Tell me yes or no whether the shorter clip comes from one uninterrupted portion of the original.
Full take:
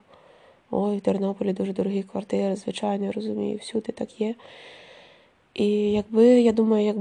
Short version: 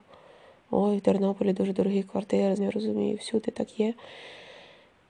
no